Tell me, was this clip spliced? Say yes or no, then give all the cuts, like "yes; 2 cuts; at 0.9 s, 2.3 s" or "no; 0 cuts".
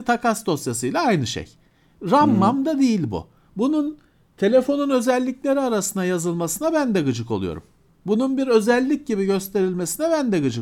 no; 0 cuts